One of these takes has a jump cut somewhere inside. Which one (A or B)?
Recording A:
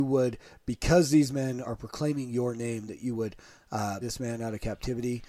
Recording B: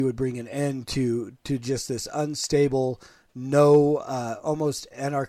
A